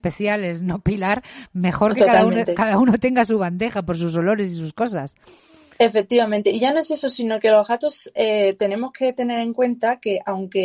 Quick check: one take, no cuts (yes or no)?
yes